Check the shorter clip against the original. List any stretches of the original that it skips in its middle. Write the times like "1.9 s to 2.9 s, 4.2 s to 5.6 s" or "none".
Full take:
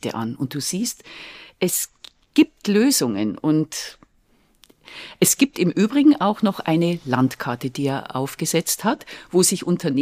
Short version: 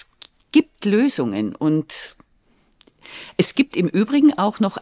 none

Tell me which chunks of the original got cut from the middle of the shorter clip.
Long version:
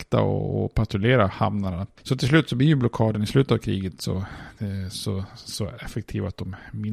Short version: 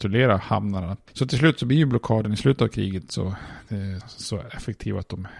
4.9 s to 5.3 s

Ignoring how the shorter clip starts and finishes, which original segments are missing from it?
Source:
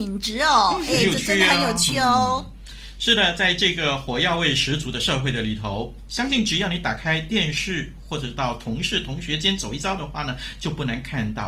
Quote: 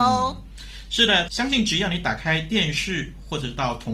3.4 s to 6.1 s

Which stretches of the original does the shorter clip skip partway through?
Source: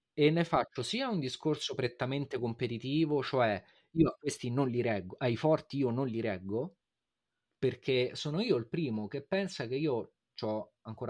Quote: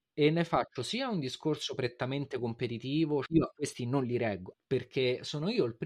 3.3 s to 3.9 s, 5.2 s to 7.4 s

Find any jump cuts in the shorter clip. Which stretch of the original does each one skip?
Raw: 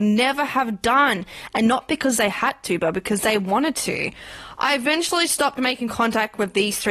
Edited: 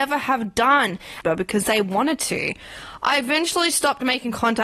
1.5 s to 2.8 s

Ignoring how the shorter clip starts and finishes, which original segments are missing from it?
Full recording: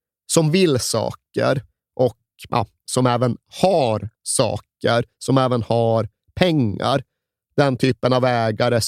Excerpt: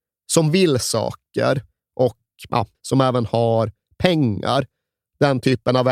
2.7 s to 5.1 s

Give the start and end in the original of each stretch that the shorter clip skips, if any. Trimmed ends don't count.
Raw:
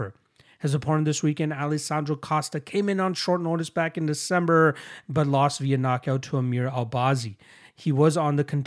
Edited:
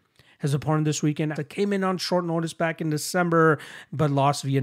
1.5 s to 2.5 s

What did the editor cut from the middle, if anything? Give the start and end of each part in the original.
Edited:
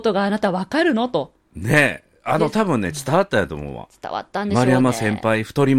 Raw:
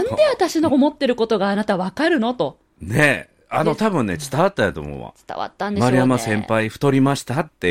none

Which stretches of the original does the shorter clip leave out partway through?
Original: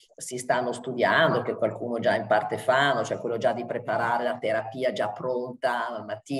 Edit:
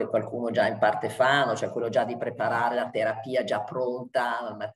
none

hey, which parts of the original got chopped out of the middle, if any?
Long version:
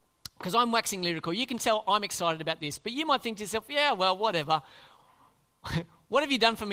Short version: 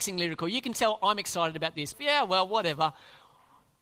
2.8 s to 3.6 s

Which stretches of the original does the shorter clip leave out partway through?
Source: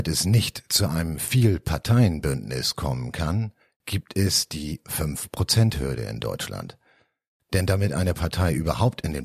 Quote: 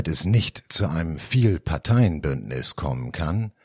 none

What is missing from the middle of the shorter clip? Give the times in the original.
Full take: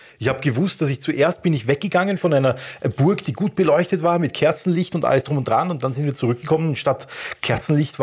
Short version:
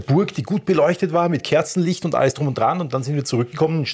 none

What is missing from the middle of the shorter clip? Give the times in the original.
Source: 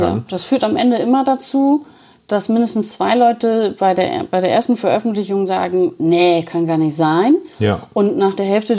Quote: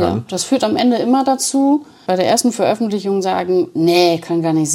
2.1 s to 4.3 s

